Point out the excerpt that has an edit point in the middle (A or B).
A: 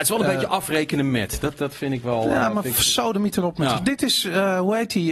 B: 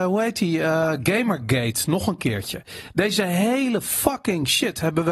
A